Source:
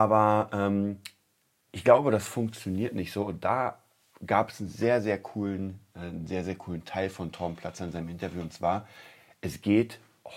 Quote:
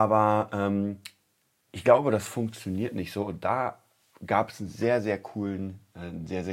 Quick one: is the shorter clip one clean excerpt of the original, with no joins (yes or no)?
yes